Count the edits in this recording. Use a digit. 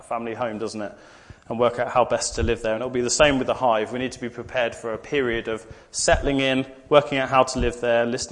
0